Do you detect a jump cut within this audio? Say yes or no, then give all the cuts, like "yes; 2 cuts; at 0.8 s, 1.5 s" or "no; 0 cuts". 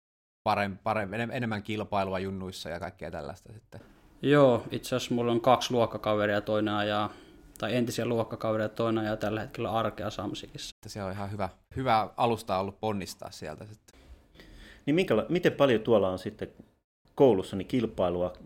yes; 1 cut; at 10.7 s